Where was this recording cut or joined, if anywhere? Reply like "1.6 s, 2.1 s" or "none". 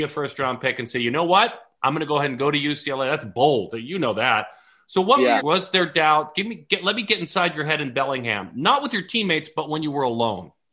5.4 s